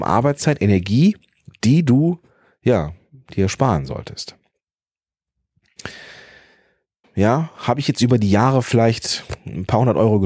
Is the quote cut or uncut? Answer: cut